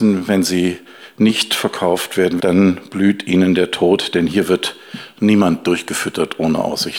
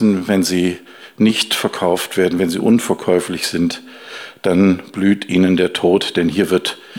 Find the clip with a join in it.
first; 1 cut; at 2.4 s

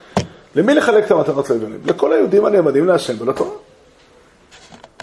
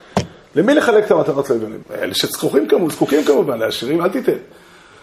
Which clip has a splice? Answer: second; 1 cut; at 1.8 s

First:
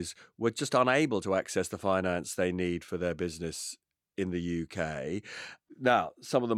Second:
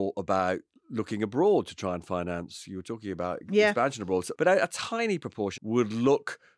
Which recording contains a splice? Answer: second; 2 cuts; at 4.3 s, 5.6 s

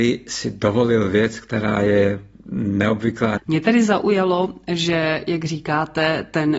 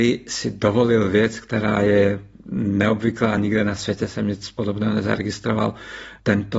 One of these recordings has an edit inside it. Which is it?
first; 1 cut; at 3.4 s

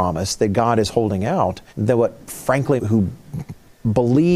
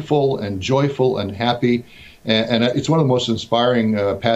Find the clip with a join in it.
first; 2 cuts; at 1.7 s, 2.8 s

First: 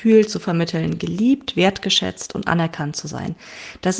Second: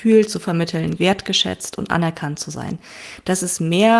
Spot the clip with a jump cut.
second; 1 cut; at 1.0 s

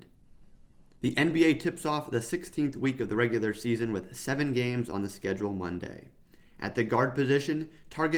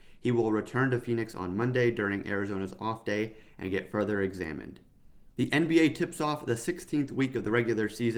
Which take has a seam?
second; 1 cut; at 5.3 s

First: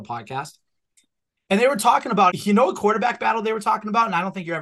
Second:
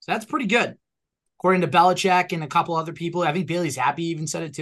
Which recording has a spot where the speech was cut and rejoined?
first; 1 cut; at 2.3 s

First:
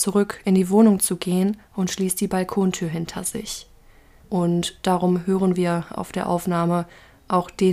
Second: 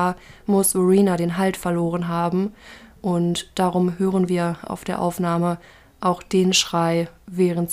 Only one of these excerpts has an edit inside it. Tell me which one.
first; 1 cut; at 4.2 s

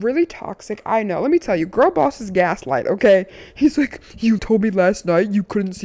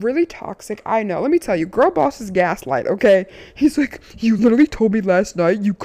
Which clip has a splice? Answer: first; 1 cut; at 4.4 s

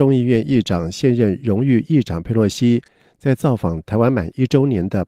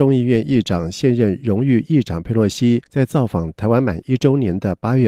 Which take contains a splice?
second; 1 cut; at 2.9 s

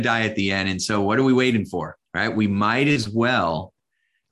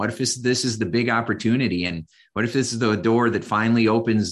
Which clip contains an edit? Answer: first; 1 cut; at 2.1 s

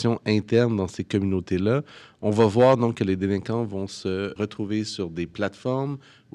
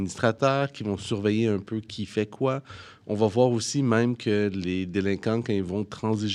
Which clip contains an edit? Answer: first; 1 cut; at 4.4 s

